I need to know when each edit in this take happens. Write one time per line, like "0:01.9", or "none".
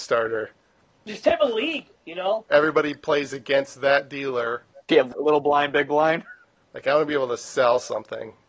0:02.5
0:04.8
0:06.6